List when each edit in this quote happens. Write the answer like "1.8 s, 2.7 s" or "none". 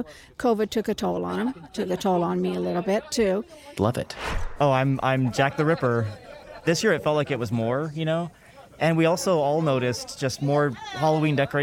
3.8 s